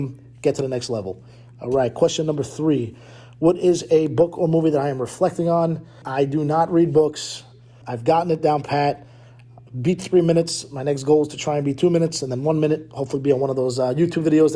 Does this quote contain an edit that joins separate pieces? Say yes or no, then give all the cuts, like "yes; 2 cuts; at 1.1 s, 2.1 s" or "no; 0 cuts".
yes; 2 cuts; at 6.0 s, 7.8 s